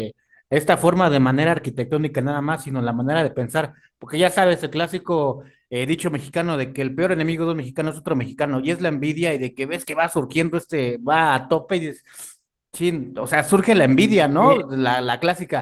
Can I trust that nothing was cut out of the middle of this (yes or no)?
yes